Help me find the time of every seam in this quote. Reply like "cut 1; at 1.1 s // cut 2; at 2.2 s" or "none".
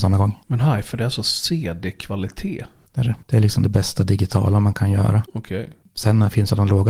cut 1; at 3.2 s